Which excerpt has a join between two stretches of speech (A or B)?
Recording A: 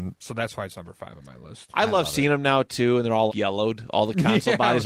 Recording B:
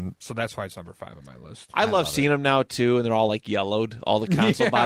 A